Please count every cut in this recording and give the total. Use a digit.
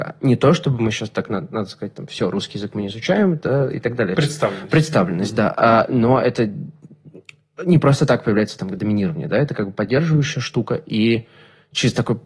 1